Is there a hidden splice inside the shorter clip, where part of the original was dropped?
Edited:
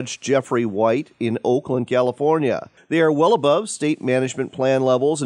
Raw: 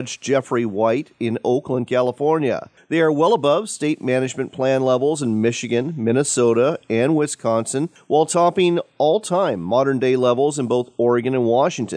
no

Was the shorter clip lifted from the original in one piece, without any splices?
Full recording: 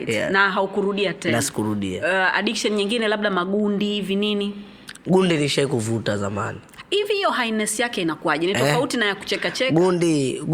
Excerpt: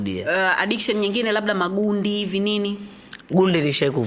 yes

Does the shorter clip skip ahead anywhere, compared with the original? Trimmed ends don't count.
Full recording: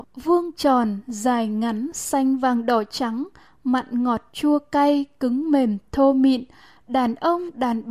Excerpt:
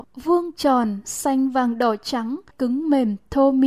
yes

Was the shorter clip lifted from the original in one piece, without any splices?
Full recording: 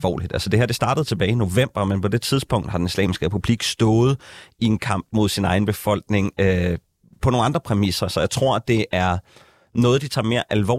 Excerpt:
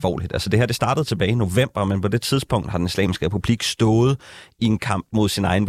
yes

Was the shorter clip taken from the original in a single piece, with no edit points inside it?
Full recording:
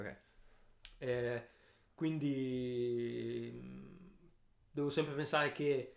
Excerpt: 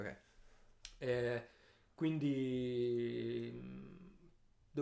yes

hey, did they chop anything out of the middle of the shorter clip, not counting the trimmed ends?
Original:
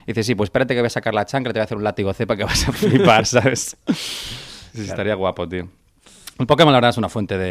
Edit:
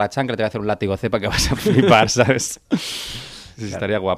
no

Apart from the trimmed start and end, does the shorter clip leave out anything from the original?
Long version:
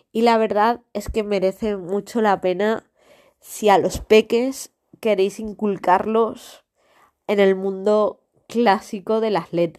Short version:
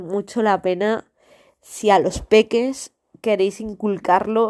no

